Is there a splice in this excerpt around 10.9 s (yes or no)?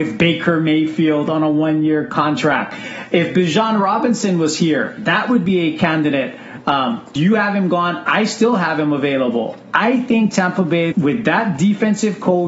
yes